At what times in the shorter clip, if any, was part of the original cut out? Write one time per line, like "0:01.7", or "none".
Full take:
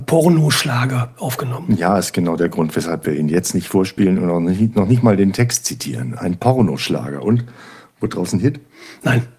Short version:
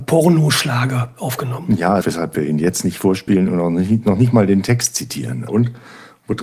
0:02.0
0:05.5